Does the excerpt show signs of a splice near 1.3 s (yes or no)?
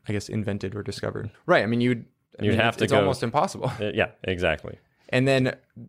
yes